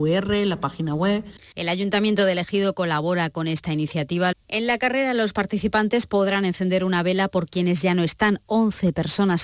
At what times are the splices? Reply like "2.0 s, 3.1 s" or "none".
4.3 s